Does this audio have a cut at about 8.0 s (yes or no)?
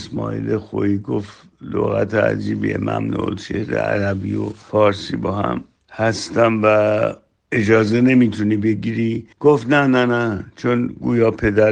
no